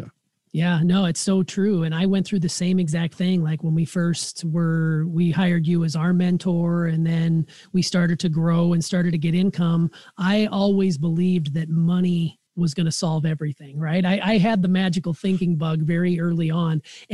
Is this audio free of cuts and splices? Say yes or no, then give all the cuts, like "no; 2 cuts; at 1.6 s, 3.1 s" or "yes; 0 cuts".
no; 1 cut; at 12.5 s